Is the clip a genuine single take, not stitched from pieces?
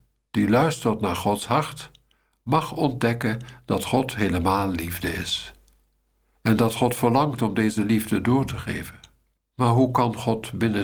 no; 1 cut; at 9.4 s

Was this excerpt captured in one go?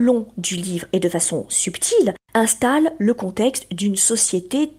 no; 1 cut; at 2.2 s

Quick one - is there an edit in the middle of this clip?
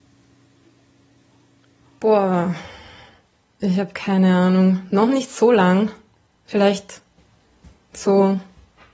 no; 0 cuts

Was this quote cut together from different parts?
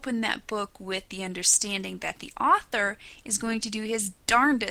no; 0 cuts

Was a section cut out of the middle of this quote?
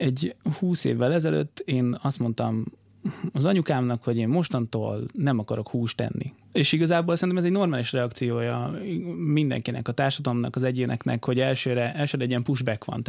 yes; 1 cut; at 6.4 s

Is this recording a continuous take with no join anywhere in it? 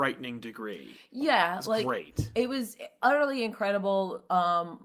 yes; 0 cuts

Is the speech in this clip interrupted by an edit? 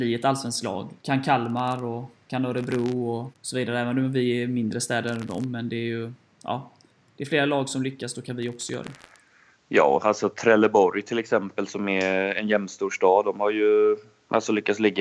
no; 0 cuts

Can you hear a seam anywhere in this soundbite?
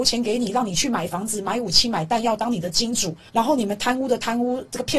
no; 0 cuts

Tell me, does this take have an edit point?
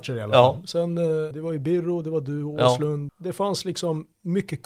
yes; 2 cuts; at 1.3 s, 3.1 s

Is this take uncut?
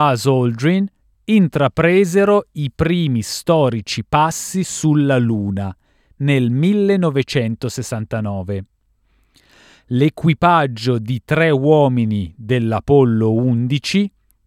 yes; 0 cuts

